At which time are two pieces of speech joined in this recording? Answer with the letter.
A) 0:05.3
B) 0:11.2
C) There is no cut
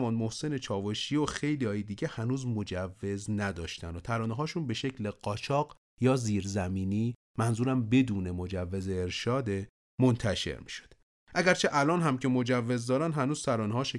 C